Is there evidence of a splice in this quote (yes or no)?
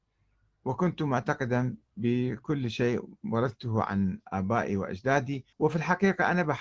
yes